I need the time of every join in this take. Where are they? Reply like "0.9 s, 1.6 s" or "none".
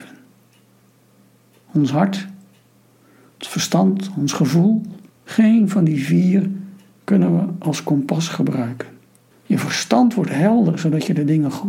5.1 s, 9.3 s